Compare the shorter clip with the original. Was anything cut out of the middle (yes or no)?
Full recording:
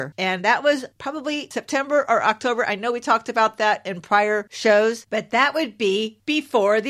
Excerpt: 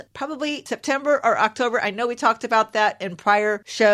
no